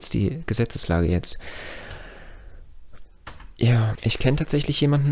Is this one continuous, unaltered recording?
no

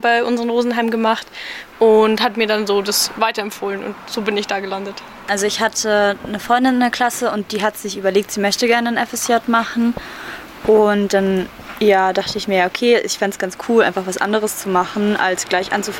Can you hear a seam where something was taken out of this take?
no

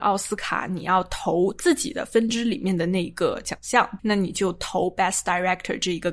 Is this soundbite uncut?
no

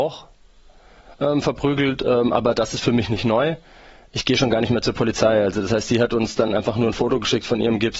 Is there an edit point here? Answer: no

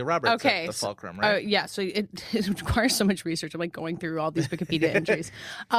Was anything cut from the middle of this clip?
no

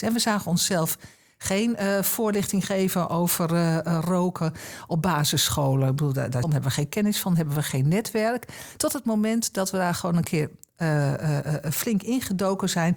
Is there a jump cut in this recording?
yes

